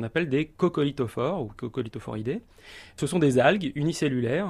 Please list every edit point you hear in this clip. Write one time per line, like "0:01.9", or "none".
none